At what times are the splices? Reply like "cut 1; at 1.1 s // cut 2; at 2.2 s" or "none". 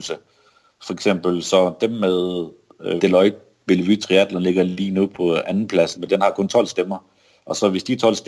cut 1; at 3.0 s // cut 2; at 6.0 s